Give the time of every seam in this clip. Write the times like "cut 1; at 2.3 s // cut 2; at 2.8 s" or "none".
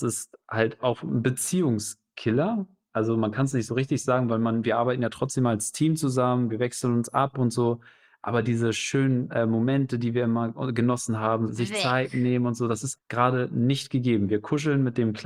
cut 1; at 11.5 s // cut 2; at 13.0 s